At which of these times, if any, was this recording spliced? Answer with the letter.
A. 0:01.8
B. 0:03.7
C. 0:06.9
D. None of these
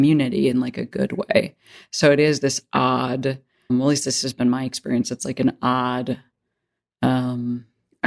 B